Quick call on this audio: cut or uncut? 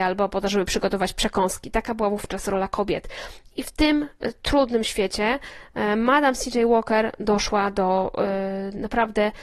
uncut